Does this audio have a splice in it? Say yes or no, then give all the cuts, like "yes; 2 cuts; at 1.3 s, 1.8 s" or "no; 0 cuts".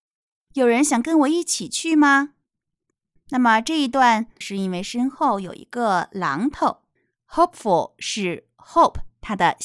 yes; 2 cuts; at 3.2 s, 4.4 s